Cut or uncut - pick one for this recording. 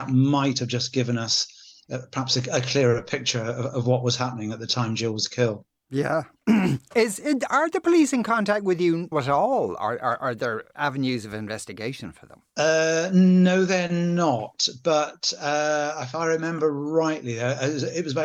cut